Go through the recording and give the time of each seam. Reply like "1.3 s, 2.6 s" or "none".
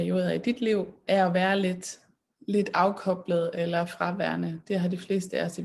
1.1 s

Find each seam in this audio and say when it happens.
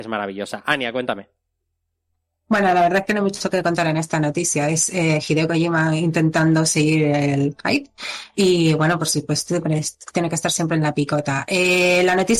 none

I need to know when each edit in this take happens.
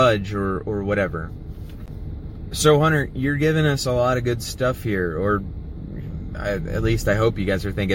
none

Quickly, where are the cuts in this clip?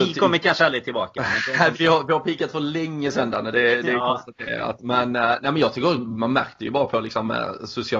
1.7 s

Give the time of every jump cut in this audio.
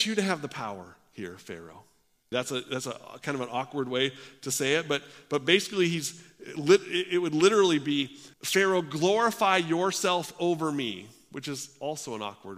2.3 s, 8.3 s

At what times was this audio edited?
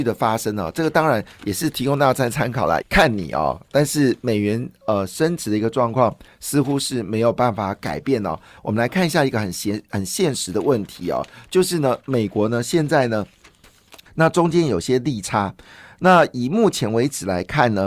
2.8 s, 8.6 s, 14.1 s

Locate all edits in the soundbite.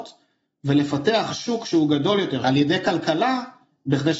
2.4 s

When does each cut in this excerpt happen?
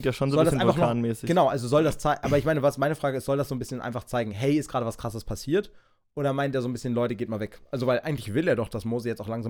none

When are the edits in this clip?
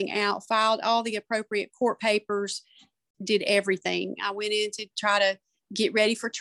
4.1 s

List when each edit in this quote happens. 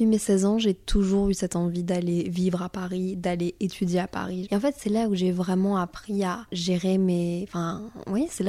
4.4 s

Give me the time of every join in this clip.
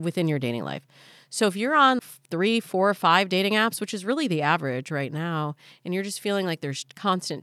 2.0 s

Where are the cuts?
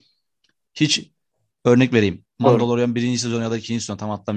2.3 s

